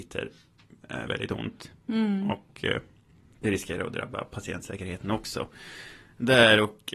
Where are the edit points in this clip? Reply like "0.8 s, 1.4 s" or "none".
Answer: 1.1 s